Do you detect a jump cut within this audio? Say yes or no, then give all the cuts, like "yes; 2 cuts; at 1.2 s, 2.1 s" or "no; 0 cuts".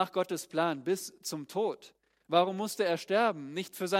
no; 0 cuts